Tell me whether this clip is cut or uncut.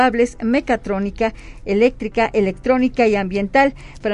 uncut